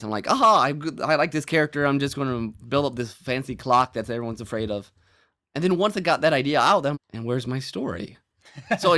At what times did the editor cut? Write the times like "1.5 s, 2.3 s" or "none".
6.9 s